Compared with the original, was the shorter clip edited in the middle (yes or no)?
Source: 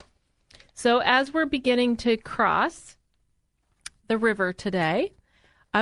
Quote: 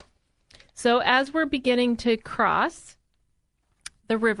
no